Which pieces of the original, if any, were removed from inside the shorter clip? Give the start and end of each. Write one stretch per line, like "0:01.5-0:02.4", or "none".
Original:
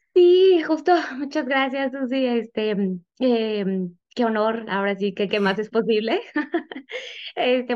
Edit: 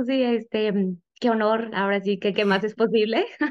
0:03.1-0:04.0